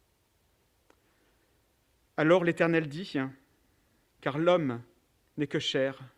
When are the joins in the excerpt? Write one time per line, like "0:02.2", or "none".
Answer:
0:04.0